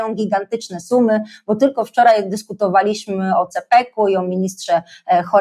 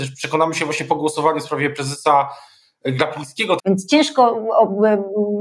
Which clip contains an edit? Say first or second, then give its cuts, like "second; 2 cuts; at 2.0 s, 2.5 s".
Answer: second; 1 cut; at 3.6 s